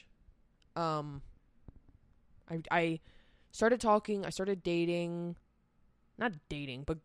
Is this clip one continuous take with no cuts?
yes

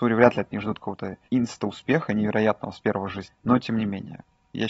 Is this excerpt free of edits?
no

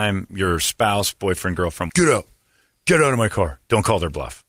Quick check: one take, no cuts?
no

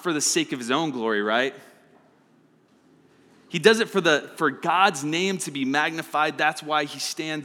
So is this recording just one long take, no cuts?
no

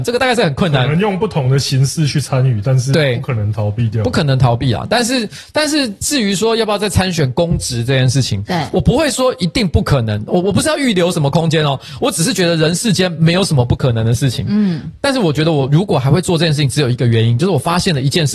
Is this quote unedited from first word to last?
yes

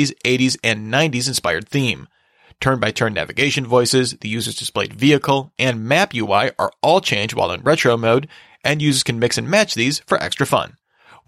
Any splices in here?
no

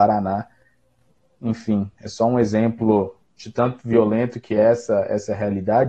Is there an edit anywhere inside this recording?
no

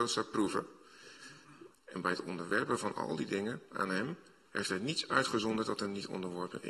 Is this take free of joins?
no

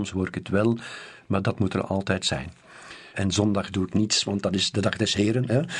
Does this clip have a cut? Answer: yes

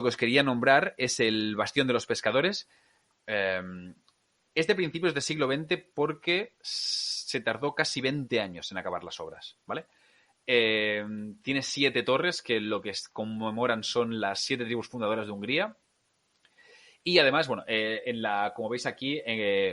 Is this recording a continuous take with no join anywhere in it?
no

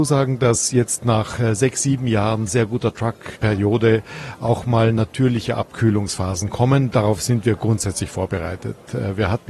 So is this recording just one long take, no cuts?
yes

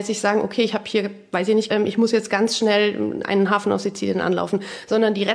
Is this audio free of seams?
no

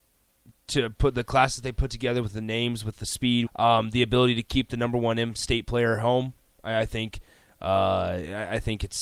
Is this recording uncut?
no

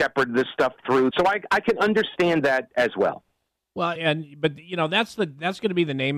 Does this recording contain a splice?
yes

